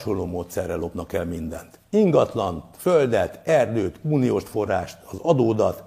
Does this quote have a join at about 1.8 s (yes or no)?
no